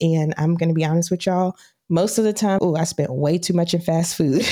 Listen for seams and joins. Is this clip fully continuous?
no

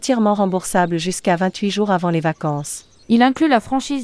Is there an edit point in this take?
yes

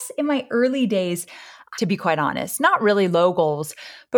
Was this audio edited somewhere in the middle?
yes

